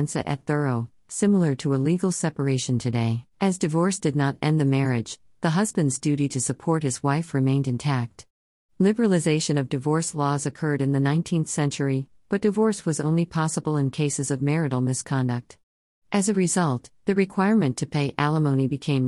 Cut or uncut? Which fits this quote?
cut